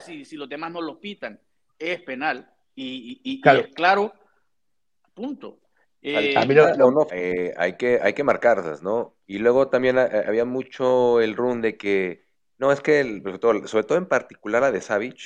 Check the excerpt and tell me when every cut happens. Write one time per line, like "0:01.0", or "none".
0:07.1
0:09.2
0:11.4

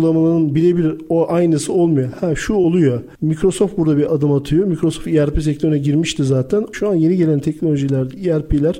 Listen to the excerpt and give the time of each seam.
0:06.7

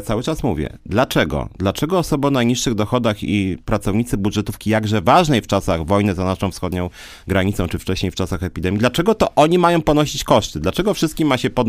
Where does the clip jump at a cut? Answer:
none

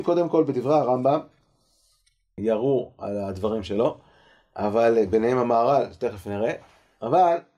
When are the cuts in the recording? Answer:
0:02.4

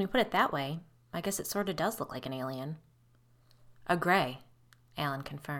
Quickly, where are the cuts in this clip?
none

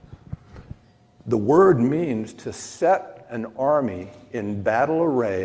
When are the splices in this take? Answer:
none

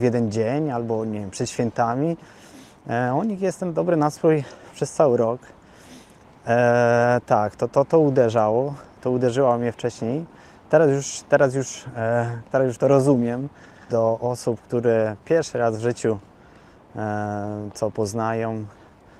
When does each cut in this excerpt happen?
0:13.9

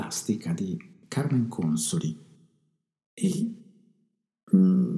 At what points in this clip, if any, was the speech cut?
0:03.1

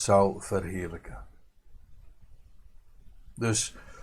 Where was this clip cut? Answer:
none

